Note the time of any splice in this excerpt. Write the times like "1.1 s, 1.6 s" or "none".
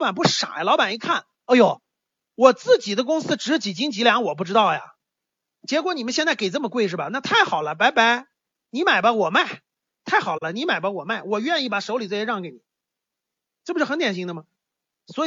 none

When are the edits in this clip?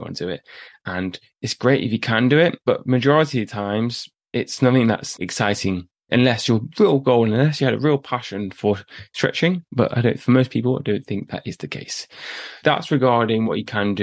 2.6 s, 5.2 s, 12.6 s

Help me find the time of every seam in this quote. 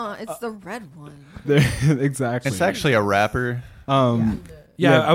none

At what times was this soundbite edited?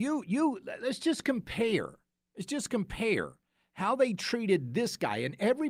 none

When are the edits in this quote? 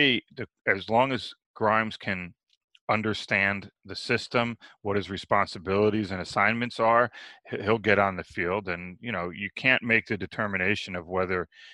none

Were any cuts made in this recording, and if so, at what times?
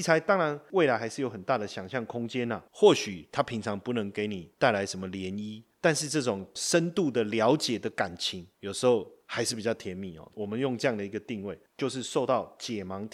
2.7 s, 11.7 s

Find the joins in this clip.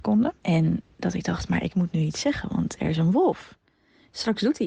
none

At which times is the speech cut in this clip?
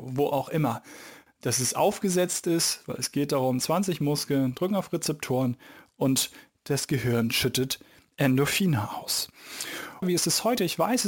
1.3 s, 10.0 s

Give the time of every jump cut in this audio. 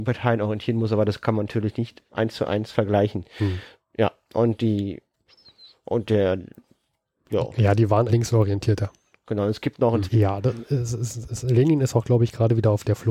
8.1 s, 10.1 s

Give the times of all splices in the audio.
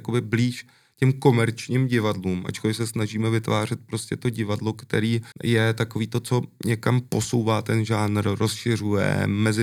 5.3 s

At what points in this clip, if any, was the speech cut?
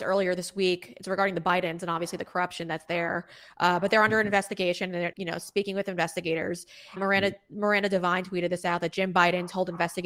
5.1 s, 7.0 s

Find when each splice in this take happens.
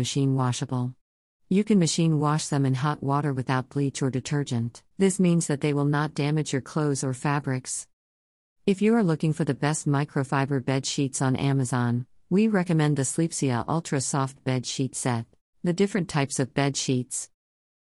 4.9 s, 15.5 s

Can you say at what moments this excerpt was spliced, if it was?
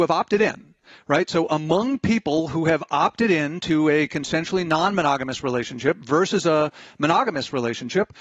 none

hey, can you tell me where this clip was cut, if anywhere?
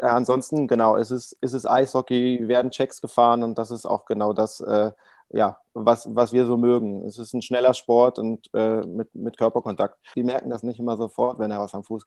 10.1 s

